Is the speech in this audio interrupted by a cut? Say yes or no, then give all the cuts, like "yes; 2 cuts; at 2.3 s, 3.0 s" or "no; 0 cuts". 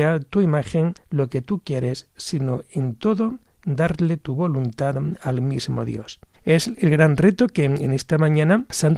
yes; 1 cut; at 6.3 s